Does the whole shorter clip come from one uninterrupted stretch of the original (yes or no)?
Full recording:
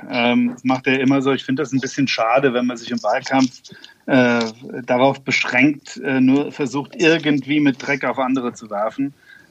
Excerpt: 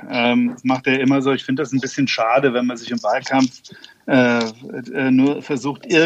no